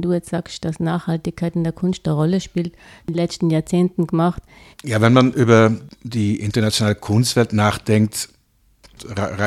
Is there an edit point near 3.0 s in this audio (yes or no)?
yes